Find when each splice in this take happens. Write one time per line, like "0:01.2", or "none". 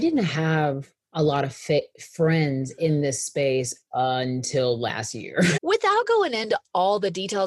0:01.0
0:05.6